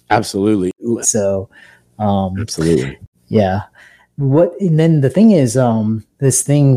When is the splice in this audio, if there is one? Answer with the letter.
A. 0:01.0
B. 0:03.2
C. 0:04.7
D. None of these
A